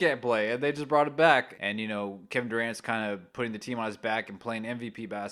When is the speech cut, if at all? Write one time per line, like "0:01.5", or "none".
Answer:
0:01.5